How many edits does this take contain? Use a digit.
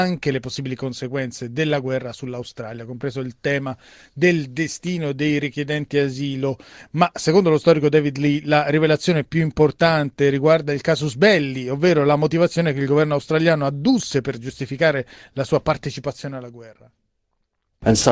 0